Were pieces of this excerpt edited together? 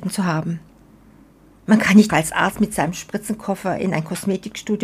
yes; 1 cut; at 2.1 s

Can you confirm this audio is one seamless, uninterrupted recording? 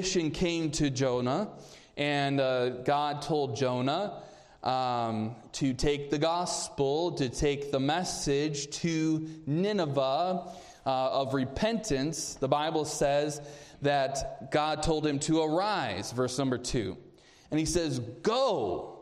yes; 0 cuts

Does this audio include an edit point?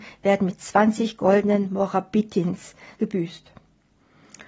yes; 1 cut; at 3.0 s

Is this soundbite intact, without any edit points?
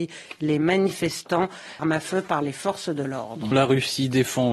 no; 2 cuts; at 1.8 s, 3.5 s

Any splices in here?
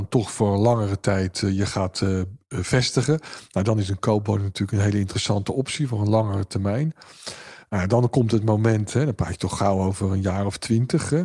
no; 0 cuts

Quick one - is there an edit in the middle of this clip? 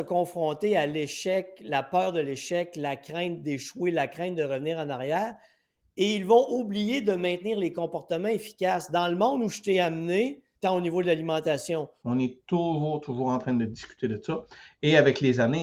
yes; 2 cuts; at 10.6 s, 12.0 s

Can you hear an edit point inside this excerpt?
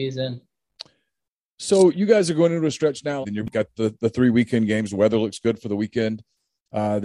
yes; 1 cut; at 3.2 s

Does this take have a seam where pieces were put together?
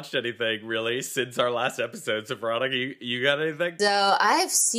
yes; 1 cut; at 3.8 s

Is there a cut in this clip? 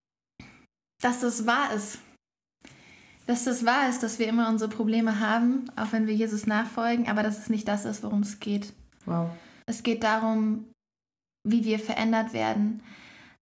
yes; 1 cut; at 9.6 s

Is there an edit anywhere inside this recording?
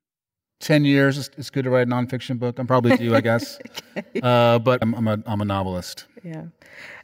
yes; 1 cut; at 4.8 s

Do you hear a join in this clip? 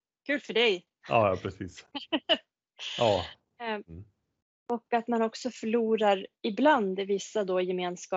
yes; 2 cuts; at 3.8 s, 6.4 s

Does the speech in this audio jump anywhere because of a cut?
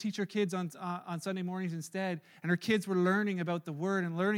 no; 0 cuts

